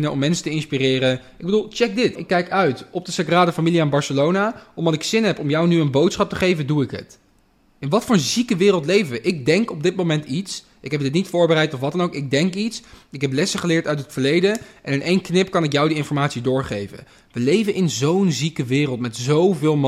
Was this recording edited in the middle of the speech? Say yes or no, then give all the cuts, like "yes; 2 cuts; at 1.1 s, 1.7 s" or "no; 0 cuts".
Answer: yes; 1 cut; at 2.2 s